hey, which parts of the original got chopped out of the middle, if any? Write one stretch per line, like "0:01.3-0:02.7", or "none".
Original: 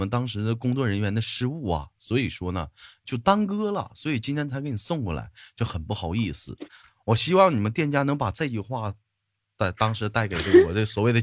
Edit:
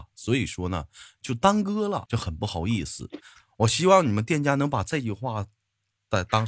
0:03.9-0:05.5